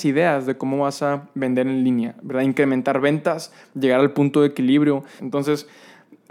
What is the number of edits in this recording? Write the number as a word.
one